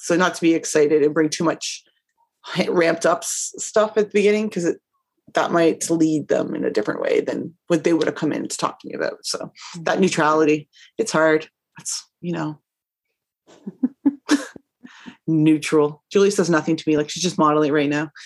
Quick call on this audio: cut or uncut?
uncut